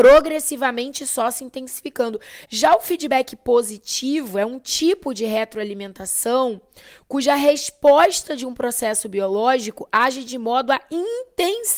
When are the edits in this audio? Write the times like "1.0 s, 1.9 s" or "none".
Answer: 2.5 s